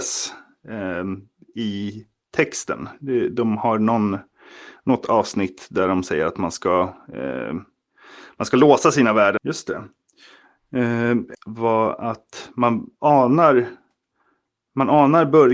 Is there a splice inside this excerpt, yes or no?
yes